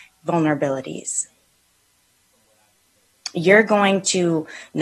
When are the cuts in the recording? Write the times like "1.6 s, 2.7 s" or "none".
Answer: none